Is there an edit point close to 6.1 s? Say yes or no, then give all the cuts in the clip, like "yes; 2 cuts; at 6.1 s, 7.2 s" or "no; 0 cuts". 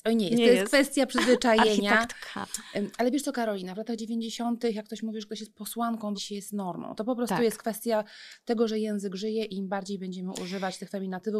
yes; 1 cut; at 6.1 s